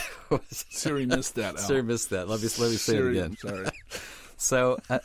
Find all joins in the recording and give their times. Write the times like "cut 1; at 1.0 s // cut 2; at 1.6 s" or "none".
cut 1; at 3.3 s

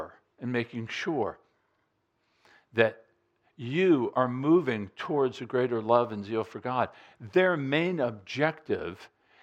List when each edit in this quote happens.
none

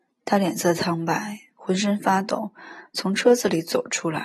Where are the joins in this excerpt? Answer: none

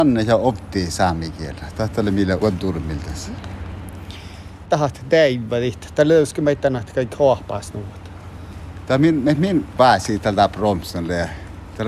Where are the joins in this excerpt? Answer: none

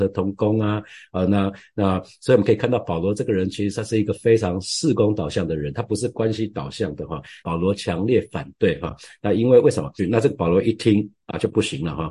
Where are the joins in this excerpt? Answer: cut 1; at 7.4 s // cut 2; at 10.0 s

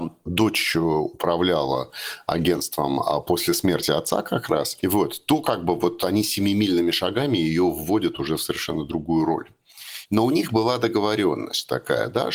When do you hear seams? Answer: cut 1; at 4.8 s // cut 2; at 10.0 s

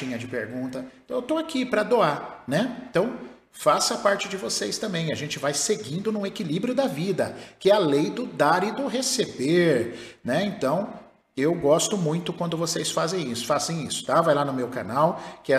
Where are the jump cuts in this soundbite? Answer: none

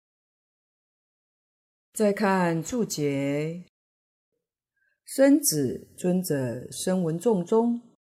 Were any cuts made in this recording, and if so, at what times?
none

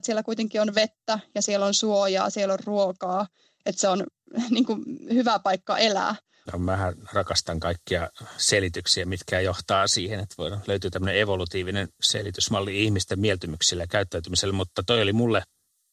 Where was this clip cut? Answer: cut 1; at 6.5 s

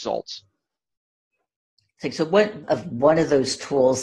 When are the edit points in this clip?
cut 1; at 2.6 s

